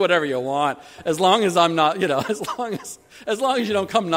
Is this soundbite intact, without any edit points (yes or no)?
yes